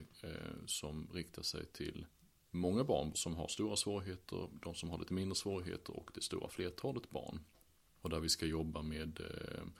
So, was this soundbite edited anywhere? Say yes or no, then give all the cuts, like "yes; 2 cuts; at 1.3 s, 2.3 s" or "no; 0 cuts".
yes; 1 cut; at 3.1 s